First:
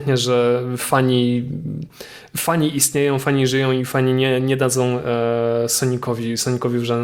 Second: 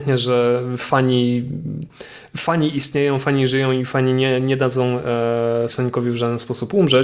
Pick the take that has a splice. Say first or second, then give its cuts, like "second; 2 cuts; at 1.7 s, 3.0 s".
second; 1 cut; at 5.7 s